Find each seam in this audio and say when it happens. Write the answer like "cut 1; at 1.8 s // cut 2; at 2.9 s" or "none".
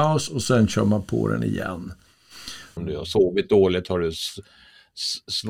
cut 1; at 2.8 s